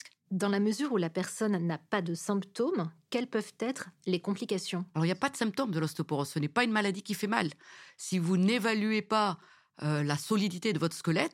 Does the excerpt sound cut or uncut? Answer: uncut